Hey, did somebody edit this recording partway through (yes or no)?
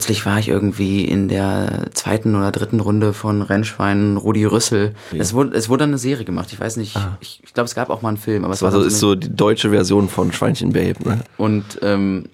yes